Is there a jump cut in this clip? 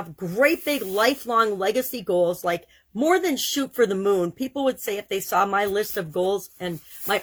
no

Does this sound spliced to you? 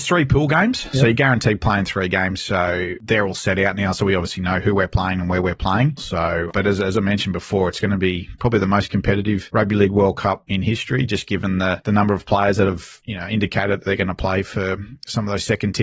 yes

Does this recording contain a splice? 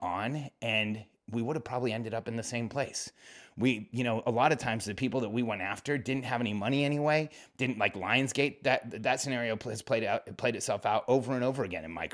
no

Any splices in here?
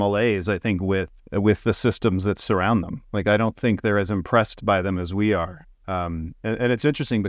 yes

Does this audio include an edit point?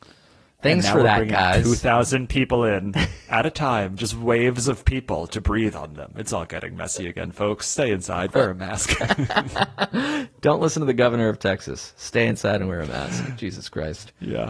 no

